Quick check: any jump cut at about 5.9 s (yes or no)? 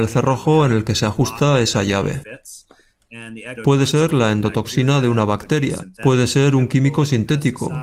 no